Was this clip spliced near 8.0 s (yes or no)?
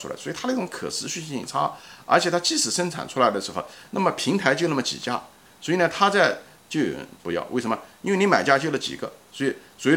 no